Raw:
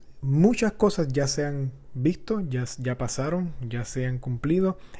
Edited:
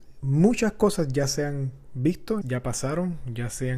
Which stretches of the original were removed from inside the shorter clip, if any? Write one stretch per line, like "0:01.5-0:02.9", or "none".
0:02.4-0:02.8